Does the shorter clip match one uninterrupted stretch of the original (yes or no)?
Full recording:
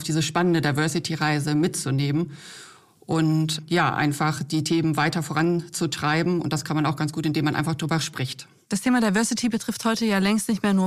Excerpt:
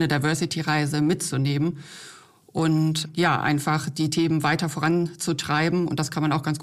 yes